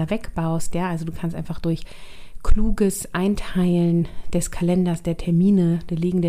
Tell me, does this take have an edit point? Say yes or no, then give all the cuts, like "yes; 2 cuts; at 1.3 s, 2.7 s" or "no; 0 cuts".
no; 0 cuts